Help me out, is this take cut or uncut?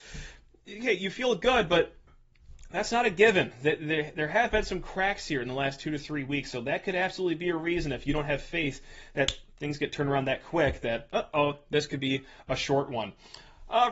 uncut